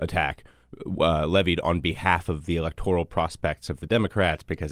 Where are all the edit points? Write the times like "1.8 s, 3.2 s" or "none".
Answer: none